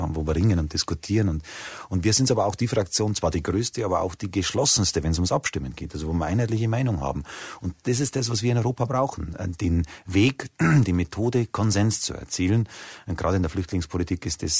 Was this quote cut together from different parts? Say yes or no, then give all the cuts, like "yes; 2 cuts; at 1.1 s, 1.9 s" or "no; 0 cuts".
no; 0 cuts